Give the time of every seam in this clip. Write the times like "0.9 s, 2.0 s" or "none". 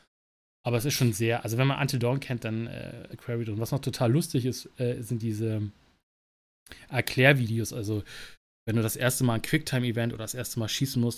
3.1 s